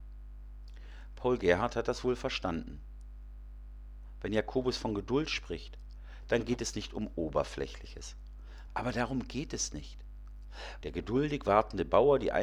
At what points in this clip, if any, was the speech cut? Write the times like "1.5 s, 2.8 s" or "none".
8.7 s, 10.8 s